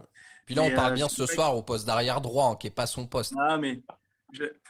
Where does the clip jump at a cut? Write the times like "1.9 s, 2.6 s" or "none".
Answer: 3.3 s